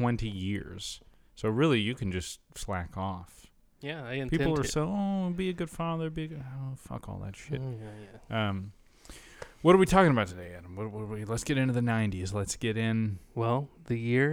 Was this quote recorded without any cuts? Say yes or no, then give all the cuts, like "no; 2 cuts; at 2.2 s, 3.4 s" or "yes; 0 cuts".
yes; 0 cuts